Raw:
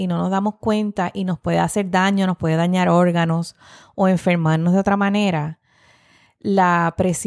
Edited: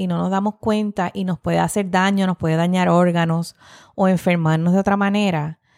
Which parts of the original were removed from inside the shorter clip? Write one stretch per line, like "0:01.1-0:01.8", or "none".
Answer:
none